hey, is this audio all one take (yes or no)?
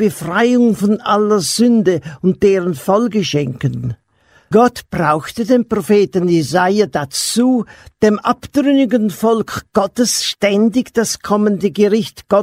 no